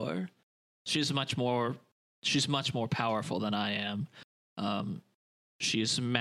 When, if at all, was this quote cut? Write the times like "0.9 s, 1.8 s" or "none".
none